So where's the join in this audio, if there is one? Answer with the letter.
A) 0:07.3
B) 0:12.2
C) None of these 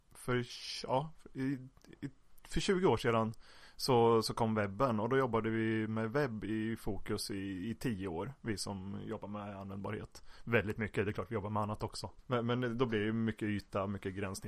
B